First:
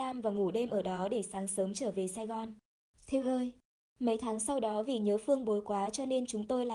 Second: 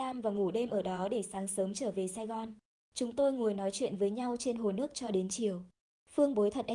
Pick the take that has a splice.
second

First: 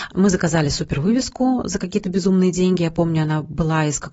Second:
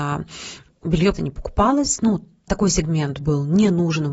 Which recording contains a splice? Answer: second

